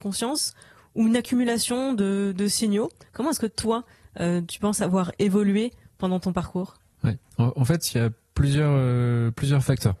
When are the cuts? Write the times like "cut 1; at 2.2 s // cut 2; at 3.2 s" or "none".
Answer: none